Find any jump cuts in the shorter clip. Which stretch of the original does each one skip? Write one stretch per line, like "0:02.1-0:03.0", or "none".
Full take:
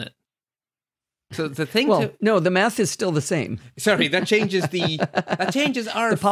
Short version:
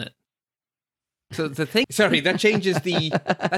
0:01.8-0:03.7